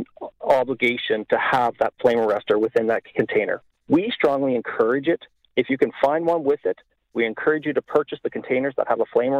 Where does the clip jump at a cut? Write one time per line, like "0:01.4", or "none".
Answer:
none